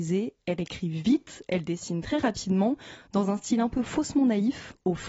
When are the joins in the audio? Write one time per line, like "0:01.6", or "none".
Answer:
none